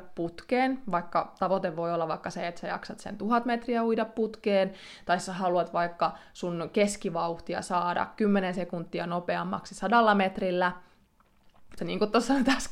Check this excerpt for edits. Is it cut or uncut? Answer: cut